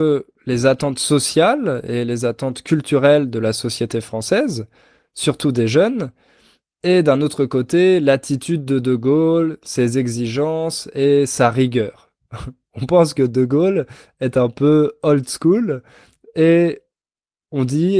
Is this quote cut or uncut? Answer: uncut